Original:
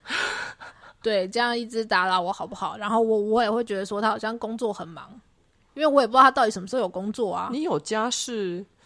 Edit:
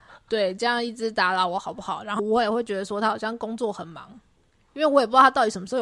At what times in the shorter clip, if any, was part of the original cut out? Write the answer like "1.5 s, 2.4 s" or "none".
2.2 s